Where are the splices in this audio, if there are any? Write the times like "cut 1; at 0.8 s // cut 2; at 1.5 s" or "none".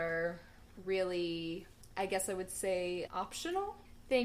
cut 1; at 3.1 s